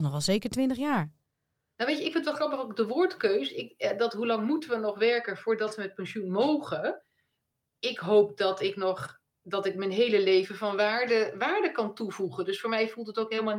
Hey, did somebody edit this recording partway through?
no; 0 cuts

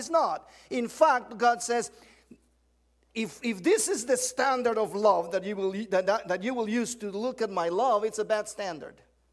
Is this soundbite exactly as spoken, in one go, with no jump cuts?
yes; 0 cuts

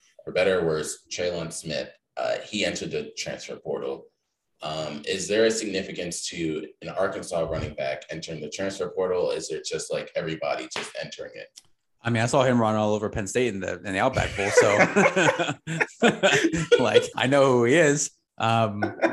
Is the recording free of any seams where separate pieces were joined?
no; 1 cut; at 17.1 s

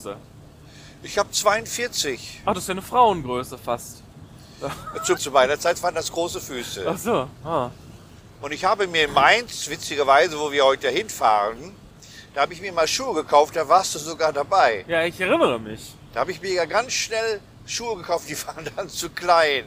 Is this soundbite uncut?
no; 1 cut; at 5.2 s

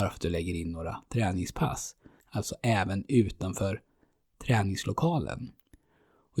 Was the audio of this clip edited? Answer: yes; 1 cut; at 2.2 s

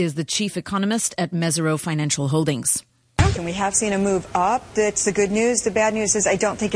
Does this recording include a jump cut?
yes; 1 cut; at 3.4 s

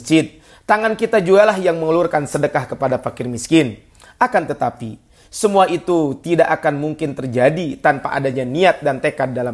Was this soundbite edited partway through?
no; 0 cuts

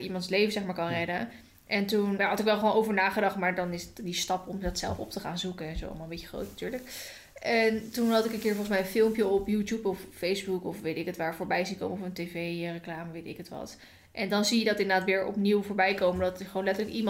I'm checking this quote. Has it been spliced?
yes; 1 cut; at 2.2 s

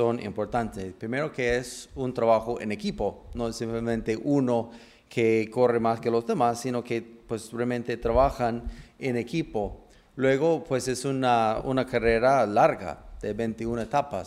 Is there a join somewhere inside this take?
no; 0 cuts

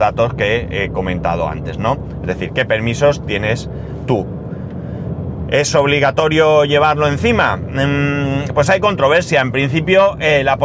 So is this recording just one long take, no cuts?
yes; 0 cuts

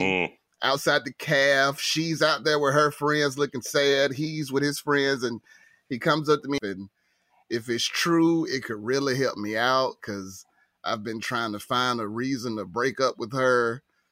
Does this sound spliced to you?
yes; 1 cut; at 6.6 s

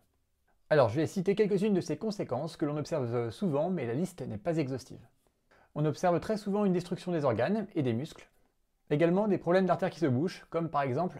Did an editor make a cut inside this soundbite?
no; 0 cuts

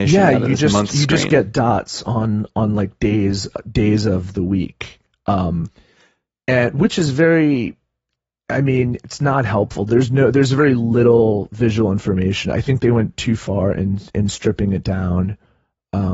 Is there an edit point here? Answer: no; 0 cuts

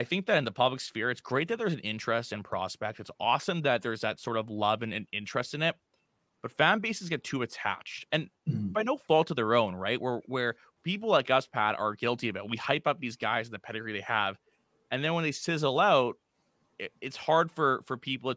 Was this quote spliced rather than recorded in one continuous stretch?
no; 0 cuts

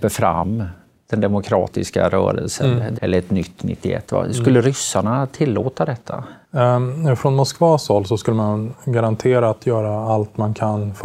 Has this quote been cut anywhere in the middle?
yes; 2 cuts; at 2.9 s, 6.4 s

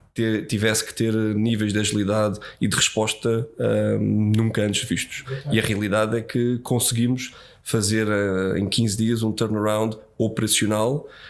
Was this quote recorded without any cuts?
yes; 0 cuts

